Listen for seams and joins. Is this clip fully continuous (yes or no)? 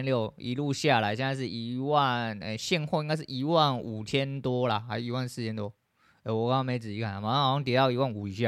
yes